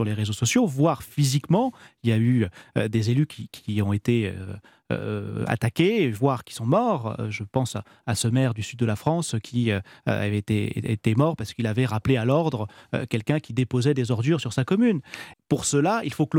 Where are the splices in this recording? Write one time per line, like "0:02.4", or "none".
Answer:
0:15.3